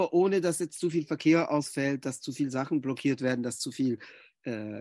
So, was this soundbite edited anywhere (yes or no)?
no